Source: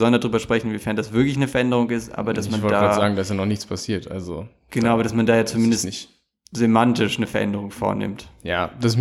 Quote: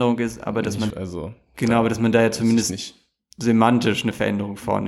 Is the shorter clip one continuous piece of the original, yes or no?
no